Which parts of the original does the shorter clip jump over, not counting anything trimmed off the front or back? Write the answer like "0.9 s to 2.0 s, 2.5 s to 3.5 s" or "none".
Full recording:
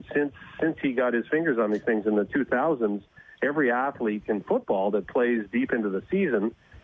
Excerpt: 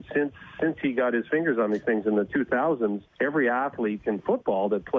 3.1 s to 3.3 s